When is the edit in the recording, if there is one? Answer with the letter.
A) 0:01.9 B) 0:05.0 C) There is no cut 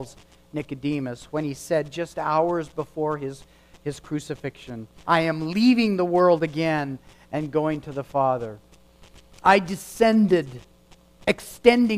B